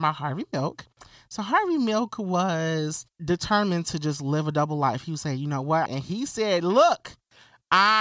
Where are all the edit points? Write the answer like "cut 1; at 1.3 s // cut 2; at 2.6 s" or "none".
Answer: cut 1; at 3.1 s // cut 2; at 5.9 s